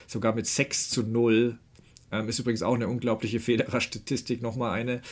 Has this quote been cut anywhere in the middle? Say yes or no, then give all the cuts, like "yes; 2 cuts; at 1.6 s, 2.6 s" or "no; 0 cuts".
no; 0 cuts